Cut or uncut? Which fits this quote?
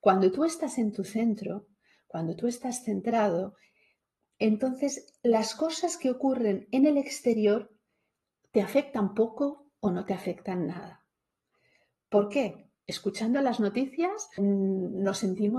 cut